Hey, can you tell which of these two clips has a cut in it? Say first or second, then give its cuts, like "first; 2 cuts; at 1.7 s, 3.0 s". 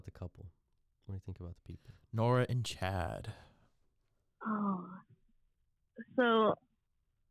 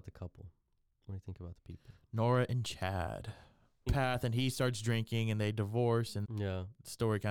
second; 2 cuts; at 3.9 s, 6.2 s